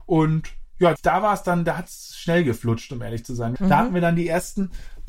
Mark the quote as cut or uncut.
cut